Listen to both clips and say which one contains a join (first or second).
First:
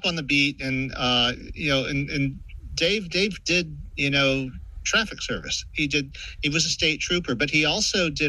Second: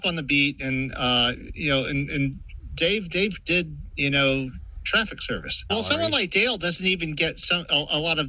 second